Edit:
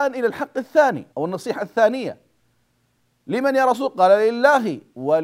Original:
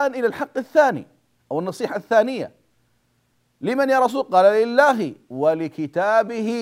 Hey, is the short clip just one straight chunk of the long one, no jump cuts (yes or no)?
no